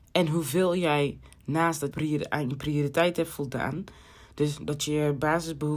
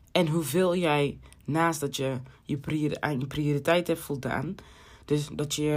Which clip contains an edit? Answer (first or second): first